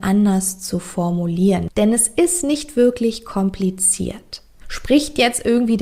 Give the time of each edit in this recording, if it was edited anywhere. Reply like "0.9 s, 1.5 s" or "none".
4.6 s